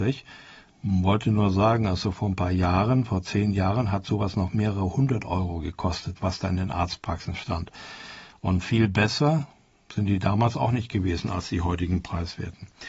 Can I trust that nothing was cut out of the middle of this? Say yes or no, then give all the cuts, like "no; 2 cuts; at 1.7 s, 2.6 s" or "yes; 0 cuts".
yes; 0 cuts